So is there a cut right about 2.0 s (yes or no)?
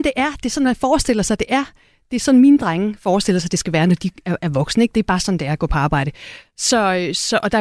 no